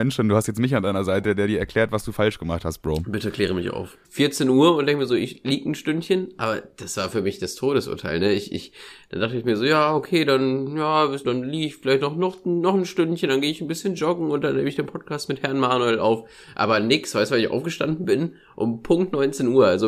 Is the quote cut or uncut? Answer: cut